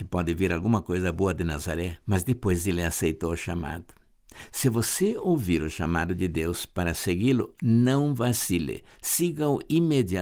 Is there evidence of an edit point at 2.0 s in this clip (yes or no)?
yes